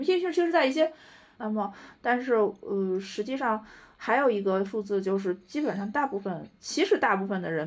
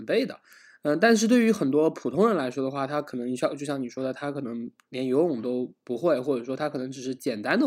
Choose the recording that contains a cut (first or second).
first